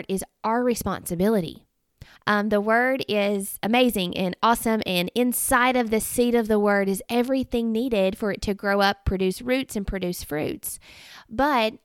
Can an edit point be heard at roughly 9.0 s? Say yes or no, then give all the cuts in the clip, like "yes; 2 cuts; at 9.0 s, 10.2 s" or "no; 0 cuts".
no; 1 cut; at 2.2 s